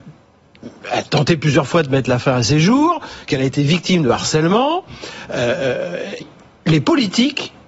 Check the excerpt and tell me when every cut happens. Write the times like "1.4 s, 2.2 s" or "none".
6.2 s